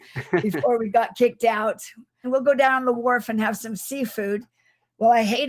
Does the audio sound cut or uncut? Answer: cut